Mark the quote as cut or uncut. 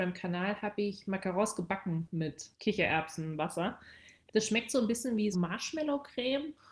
cut